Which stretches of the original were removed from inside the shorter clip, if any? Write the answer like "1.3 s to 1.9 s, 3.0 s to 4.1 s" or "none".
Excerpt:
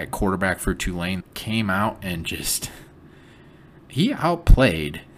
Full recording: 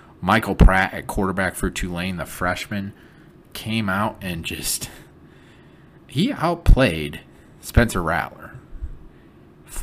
2.2 s to 3.4 s